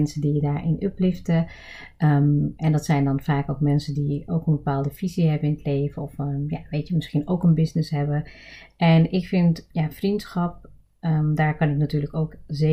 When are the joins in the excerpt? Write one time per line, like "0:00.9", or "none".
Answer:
0:09.7